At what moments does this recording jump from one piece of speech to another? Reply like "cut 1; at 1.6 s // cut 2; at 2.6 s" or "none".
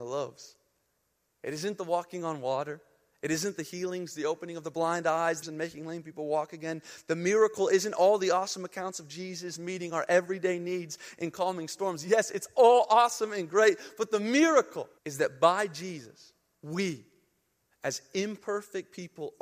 cut 1; at 5.4 s // cut 2; at 15.0 s